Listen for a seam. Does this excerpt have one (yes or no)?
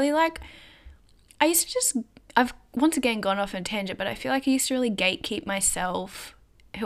no